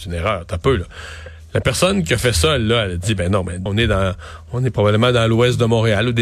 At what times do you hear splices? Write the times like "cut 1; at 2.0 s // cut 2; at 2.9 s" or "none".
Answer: cut 1; at 3.7 s